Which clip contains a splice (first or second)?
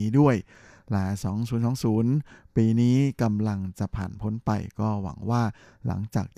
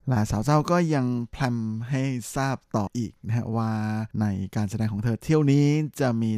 second